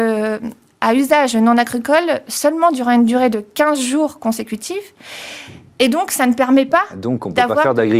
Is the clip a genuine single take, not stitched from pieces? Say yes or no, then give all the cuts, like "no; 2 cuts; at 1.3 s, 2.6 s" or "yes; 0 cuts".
yes; 0 cuts